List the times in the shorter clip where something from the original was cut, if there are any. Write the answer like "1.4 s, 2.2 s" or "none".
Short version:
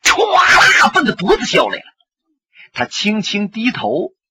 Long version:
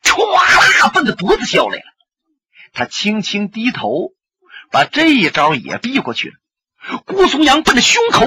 none